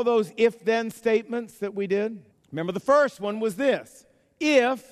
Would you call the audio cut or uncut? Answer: cut